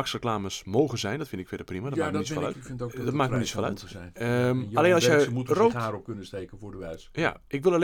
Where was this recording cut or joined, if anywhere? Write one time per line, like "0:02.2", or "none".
0:02.5